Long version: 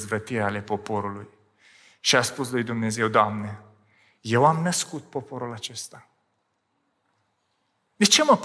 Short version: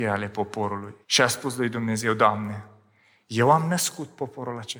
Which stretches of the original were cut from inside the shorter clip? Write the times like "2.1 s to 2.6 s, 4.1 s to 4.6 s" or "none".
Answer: 1.3 s to 2.0 s